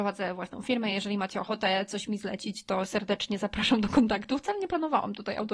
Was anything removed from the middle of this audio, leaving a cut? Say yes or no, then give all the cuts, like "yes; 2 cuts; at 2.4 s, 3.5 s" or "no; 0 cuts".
no; 0 cuts